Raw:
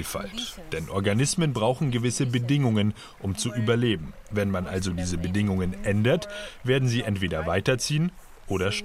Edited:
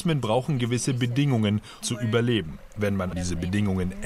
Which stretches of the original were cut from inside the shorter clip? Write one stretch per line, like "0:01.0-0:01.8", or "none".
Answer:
0:03.1-0:03.4
0:04.7-0:04.9